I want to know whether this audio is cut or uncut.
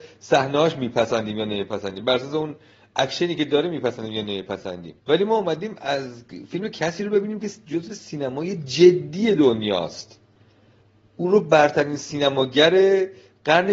cut